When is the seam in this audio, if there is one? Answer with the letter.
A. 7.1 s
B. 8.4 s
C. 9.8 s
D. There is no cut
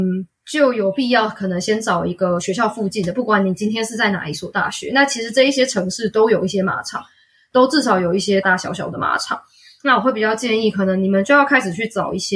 B